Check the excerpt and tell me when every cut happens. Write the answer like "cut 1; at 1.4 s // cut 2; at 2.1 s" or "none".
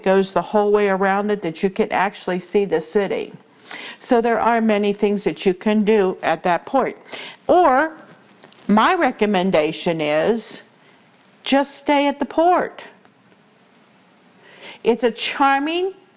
none